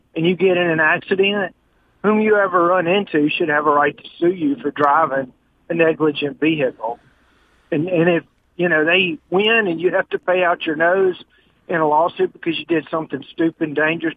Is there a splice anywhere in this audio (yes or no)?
no